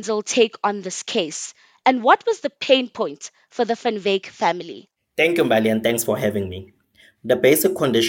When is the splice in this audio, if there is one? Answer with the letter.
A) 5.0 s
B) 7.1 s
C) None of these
B